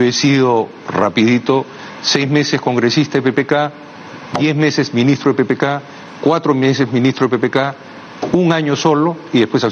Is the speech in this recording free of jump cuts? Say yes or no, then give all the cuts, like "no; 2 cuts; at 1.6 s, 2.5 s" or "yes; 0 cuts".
yes; 0 cuts